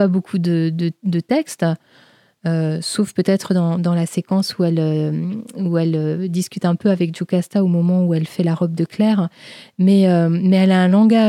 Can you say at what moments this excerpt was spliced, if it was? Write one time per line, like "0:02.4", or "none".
none